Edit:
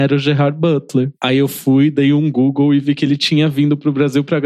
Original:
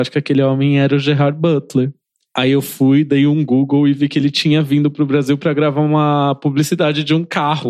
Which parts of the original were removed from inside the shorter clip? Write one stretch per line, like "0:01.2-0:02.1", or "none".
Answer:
0:01.9-0:02.3